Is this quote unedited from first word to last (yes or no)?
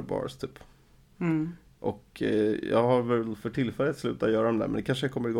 yes